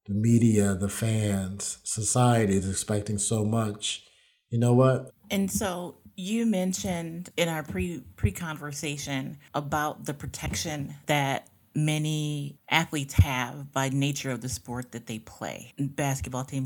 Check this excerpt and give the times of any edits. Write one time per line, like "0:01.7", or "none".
0:05.1

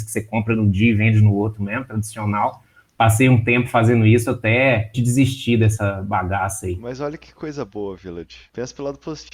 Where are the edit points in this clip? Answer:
0:04.9

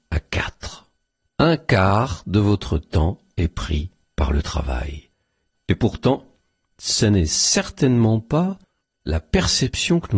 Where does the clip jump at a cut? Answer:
0:05.5

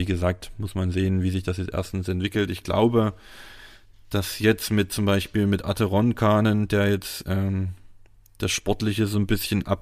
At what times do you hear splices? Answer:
none

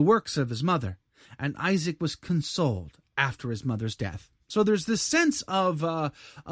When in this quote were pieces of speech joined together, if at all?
none

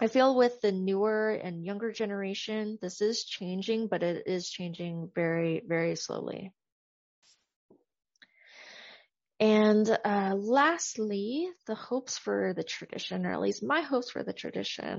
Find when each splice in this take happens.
none

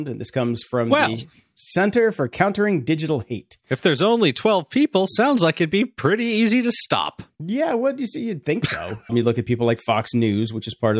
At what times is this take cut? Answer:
0:09.1

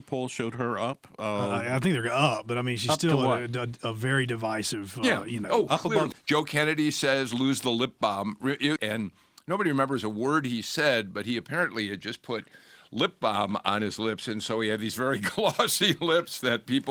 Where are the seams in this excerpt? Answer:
0:06.1
0:08.8

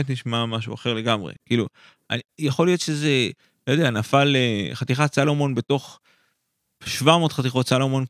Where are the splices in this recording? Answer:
0:01.4

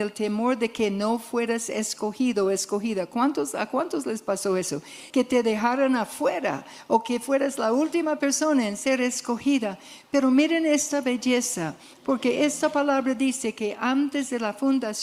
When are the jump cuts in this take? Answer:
0:05.1

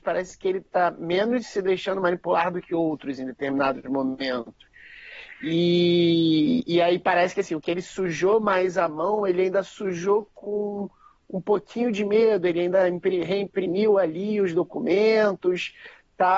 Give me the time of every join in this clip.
none

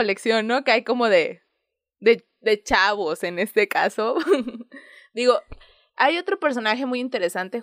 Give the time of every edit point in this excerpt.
none

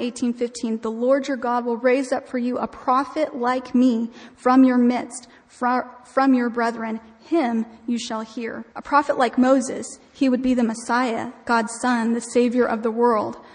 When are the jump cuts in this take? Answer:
0:08.7

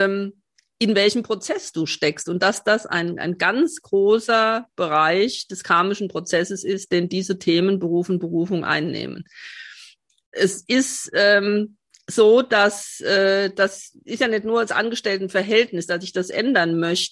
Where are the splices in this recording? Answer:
none

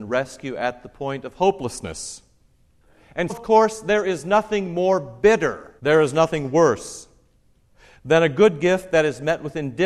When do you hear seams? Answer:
0:03.3
0:05.8

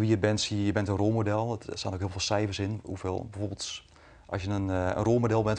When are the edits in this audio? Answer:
none

